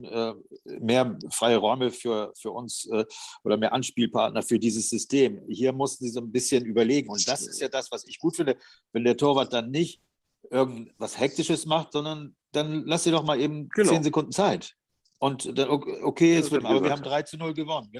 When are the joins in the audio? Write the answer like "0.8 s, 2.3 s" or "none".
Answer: 16.6 s

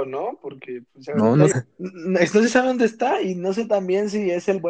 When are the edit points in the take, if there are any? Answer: 1.5 s

